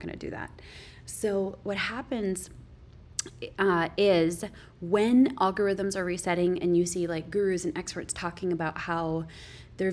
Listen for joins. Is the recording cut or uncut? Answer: uncut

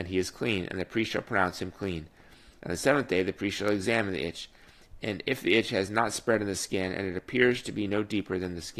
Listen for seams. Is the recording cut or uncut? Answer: cut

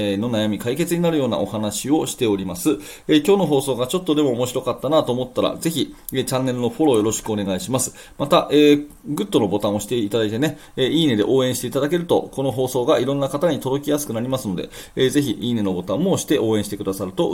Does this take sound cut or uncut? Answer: uncut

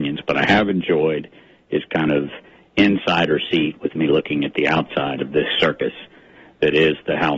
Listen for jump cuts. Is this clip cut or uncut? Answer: uncut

